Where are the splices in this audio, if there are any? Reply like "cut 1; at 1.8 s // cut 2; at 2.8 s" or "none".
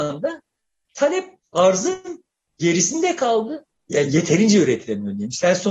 cut 1; at 3.7 s

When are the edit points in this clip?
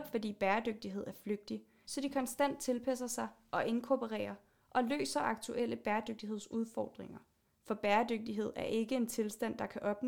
cut 1; at 1.8 s // cut 2; at 7.4 s

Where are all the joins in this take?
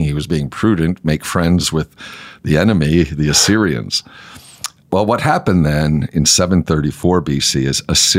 none

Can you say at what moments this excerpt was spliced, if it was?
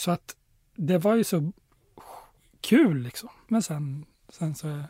cut 1; at 3.4 s

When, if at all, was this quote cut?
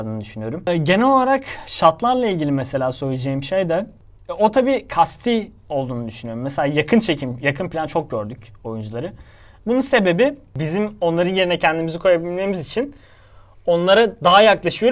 none

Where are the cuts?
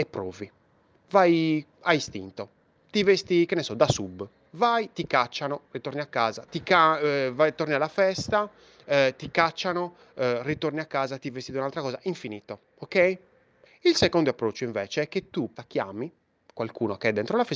cut 1; at 6.5 s // cut 2; at 13.7 s // cut 3; at 15.6 s

